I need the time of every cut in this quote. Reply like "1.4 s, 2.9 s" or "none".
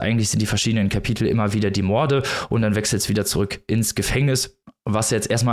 none